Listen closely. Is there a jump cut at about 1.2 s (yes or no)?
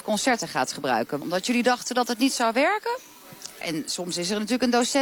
yes